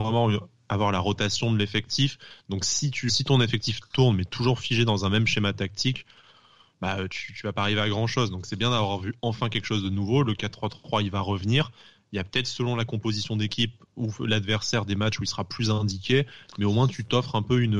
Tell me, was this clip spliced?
yes; 1 cut; at 3.1 s

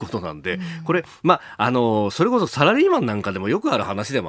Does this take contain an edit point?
no; 0 cuts

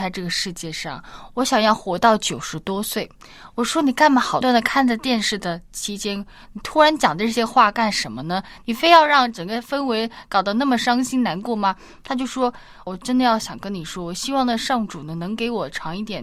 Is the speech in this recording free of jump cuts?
no; 2 cuts; at 4.4 s, 12.9 s

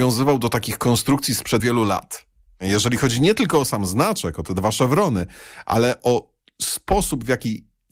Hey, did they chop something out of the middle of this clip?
yes; 1 cut; at 1.6 s

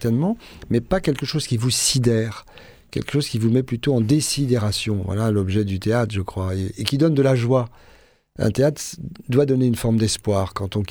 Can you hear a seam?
no; 0 cuts

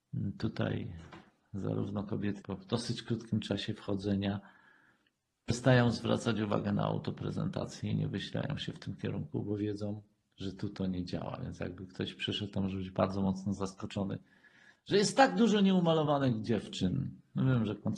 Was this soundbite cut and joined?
yes; 1 cut; at 2.4 s

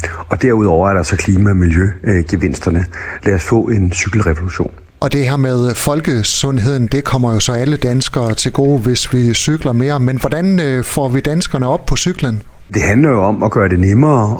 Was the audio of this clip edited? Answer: yes; 1 cut; at 3.2 s

